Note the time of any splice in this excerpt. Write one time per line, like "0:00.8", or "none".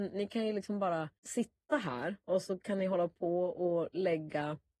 0:01.2